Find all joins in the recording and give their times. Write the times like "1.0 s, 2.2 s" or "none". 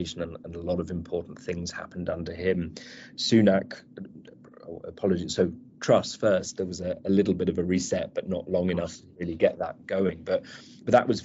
none